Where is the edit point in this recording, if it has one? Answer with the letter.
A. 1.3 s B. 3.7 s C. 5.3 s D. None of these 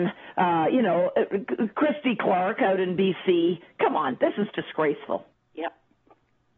C